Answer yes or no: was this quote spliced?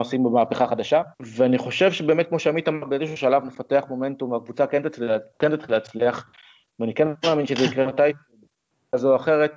yes